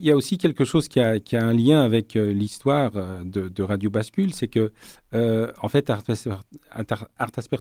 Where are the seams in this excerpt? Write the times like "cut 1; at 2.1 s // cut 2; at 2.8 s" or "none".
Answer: none